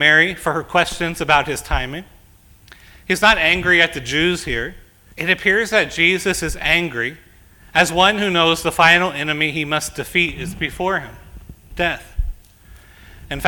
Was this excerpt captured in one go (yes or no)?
no